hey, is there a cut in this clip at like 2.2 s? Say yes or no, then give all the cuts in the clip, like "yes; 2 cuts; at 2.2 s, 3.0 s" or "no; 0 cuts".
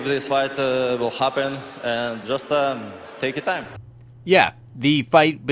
yes; 1 cut; at 2.2 s